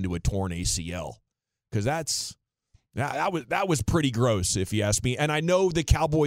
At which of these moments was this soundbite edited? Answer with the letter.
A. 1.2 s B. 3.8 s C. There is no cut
C